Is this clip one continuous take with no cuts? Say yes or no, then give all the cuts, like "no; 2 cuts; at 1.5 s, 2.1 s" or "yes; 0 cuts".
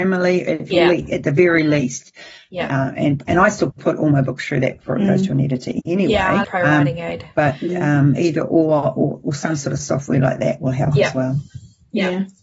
no; 1 cut; at 6.4 s